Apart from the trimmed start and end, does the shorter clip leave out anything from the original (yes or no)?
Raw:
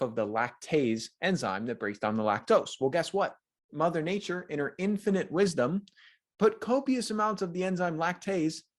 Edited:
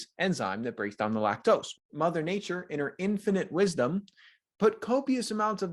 yes